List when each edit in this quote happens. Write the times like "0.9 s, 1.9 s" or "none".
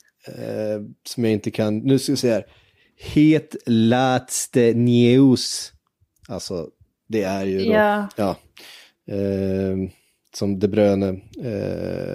9.0 s